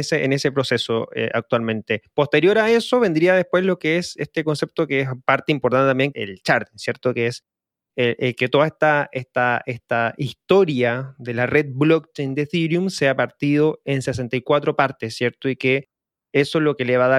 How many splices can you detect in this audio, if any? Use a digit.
1